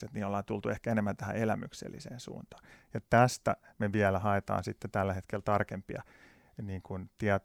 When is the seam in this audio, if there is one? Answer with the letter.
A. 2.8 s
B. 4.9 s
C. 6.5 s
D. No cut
D